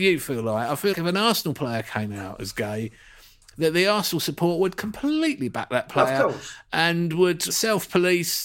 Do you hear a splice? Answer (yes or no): yes